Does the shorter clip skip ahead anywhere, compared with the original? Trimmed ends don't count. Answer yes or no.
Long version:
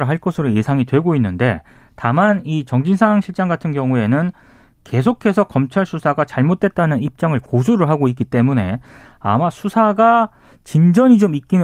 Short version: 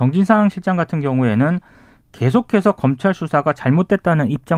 no